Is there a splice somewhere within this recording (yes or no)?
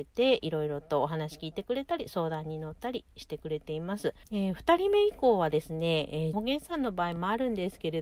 yes